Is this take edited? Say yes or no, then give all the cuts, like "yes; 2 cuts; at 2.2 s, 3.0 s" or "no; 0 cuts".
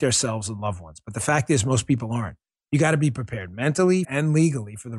yes; 1 cut; at 4.0 s